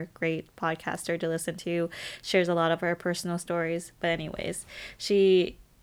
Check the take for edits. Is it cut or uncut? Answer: uncut